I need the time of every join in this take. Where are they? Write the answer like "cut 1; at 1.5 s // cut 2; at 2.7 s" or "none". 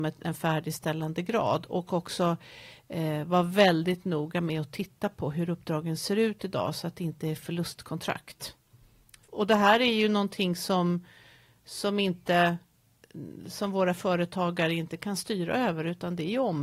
none